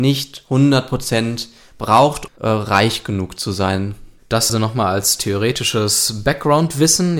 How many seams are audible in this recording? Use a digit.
2